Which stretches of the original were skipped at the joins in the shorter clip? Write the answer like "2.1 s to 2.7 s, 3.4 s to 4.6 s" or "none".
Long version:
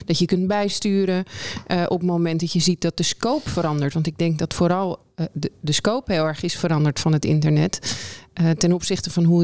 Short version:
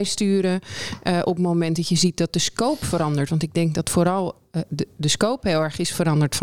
none